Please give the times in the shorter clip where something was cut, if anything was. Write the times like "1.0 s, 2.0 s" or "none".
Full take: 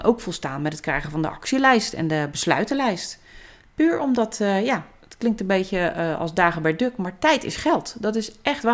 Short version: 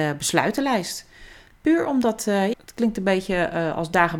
2.5 s